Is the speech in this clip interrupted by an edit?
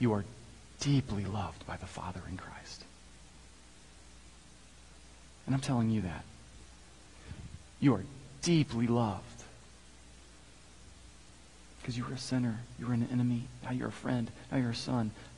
no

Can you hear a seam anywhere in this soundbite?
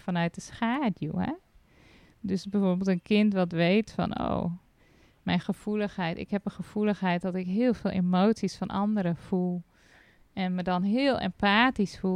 no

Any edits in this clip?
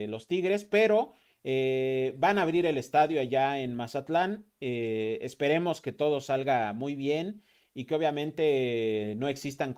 no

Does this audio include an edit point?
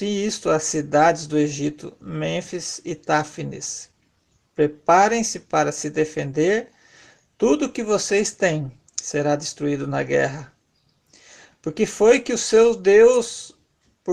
yes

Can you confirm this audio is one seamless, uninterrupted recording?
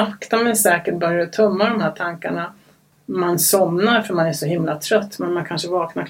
no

